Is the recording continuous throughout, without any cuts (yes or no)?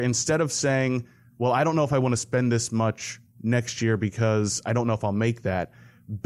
yes